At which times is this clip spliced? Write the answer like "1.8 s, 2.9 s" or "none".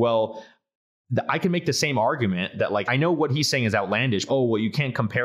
2.9 s, 4.3 s